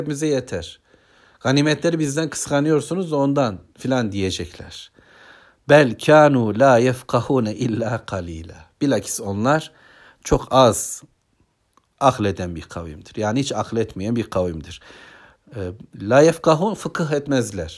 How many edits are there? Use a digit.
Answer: 0